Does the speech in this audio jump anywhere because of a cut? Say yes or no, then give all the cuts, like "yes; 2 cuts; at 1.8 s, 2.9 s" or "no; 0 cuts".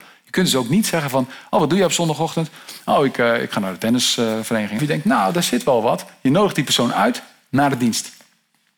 yes; 1 cut; at 4.8 s